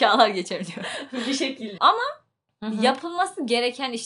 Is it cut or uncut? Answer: cut